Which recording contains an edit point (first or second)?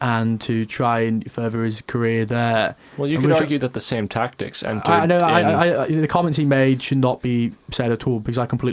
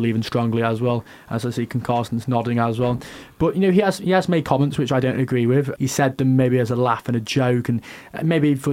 second